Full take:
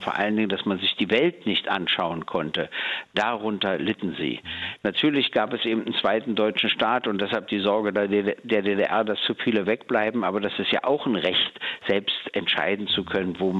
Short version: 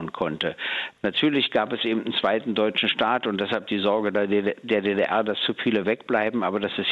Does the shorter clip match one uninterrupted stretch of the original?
no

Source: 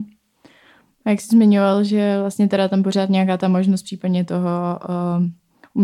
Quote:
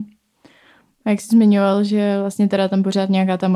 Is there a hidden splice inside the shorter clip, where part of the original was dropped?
no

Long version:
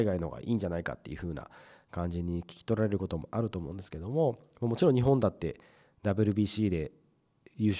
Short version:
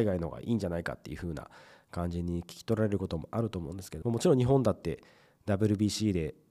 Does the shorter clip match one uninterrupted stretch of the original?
no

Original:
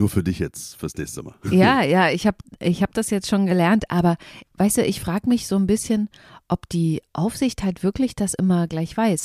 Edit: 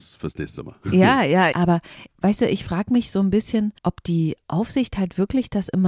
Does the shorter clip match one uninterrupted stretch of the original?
no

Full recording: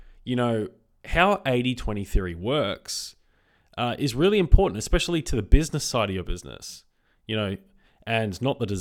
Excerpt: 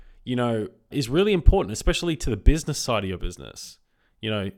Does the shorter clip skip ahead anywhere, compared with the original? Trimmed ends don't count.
yes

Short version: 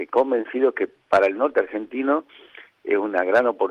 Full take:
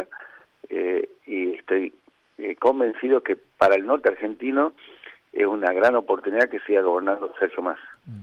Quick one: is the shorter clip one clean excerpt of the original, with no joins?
yes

